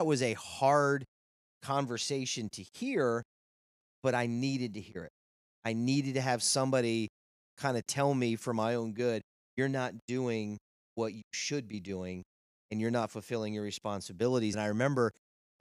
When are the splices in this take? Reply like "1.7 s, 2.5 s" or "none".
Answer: 14.5 s

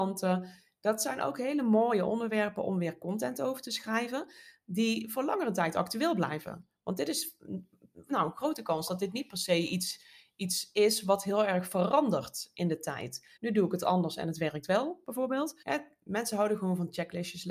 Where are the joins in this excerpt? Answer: 13.4 s, 15.6 s

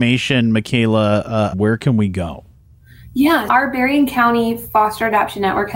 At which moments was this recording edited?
1.5 s, 3.5 s

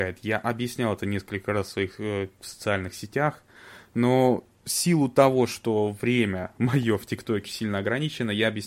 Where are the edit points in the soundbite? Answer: 7.4 s

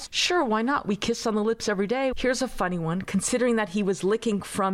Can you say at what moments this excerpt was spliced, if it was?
2.1 s

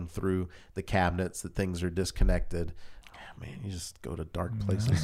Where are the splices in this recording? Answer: 3.0 s

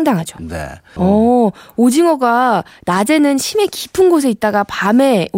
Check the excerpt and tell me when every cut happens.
1.0 s

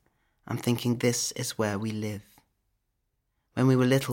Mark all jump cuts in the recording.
none

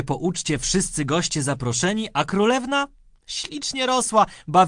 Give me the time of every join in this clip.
none

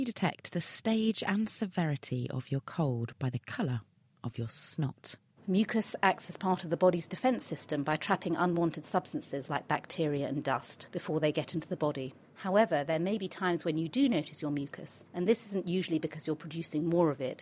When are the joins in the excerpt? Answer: 5.4 s, 12.2 s

